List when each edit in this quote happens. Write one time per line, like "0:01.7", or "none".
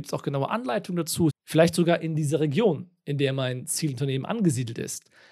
0:01.3

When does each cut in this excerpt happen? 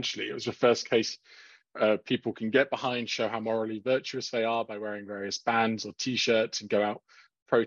none

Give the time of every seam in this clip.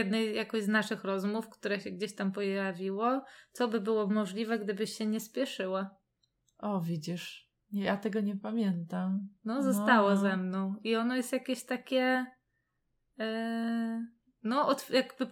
none

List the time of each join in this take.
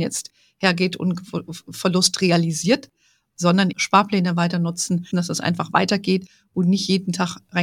0:03.7
0:05.1

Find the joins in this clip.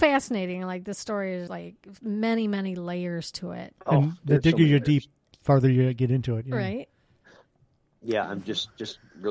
0:01.5

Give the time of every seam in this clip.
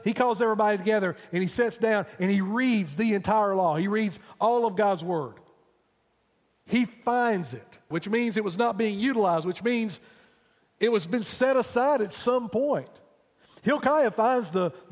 0:06.6
0:07.9

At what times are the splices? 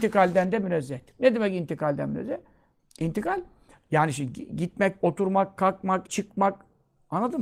0:05.0
0:06.1

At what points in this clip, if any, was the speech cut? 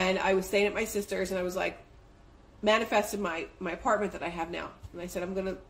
none

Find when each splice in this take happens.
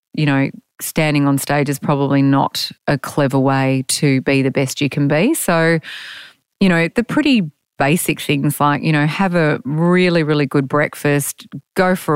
none

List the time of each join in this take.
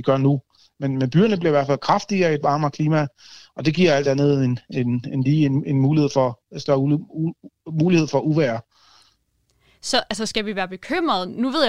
none

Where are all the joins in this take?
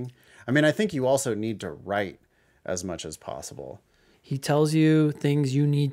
0:04.1

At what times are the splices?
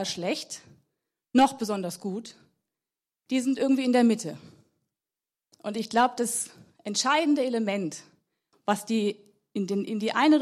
none

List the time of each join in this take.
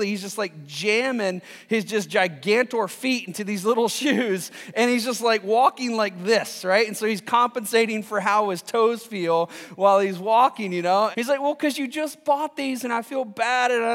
0:11.1

